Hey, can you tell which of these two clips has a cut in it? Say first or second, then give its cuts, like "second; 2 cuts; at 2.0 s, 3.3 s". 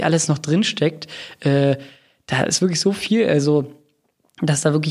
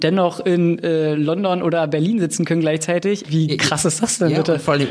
second; 1 cut; at 3.2 s